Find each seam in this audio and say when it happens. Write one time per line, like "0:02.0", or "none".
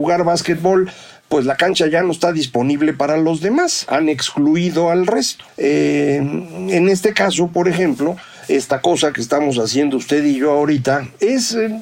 0:05.5